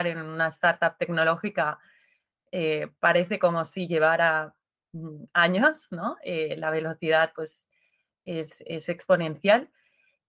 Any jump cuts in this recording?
no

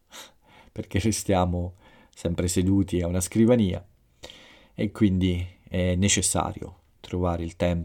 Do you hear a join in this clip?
no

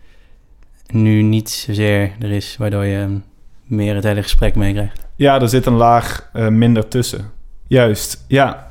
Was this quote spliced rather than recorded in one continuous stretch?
yes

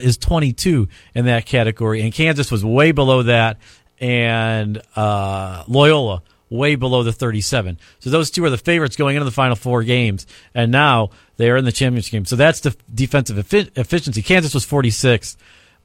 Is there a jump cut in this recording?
no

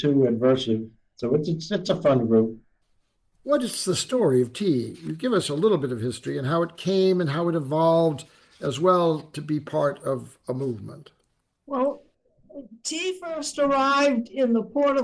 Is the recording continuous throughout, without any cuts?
yes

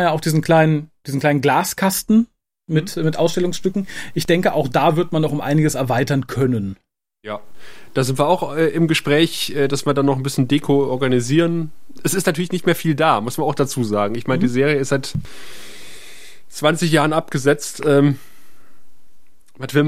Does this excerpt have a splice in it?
no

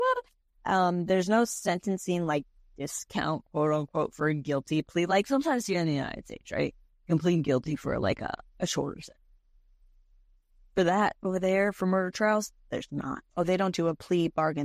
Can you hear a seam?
no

